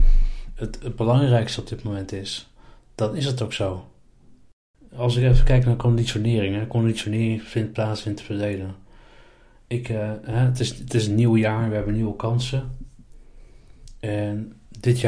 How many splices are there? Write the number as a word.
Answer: zero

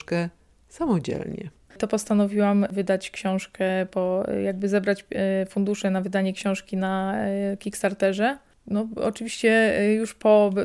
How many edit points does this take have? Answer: one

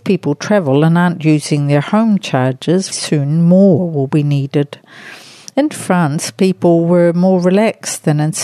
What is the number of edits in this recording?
one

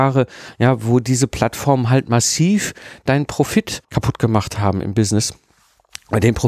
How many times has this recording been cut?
one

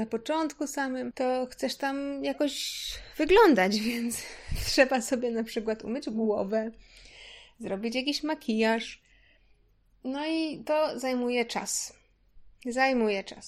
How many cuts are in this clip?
zero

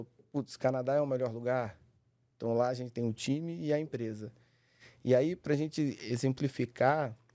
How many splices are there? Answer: one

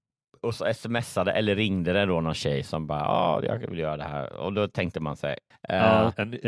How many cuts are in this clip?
one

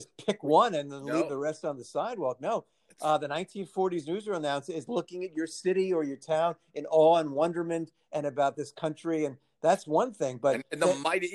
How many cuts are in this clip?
zero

